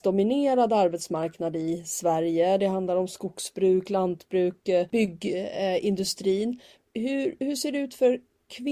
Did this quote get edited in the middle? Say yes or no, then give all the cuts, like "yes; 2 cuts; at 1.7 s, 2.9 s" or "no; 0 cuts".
no; 0 cuts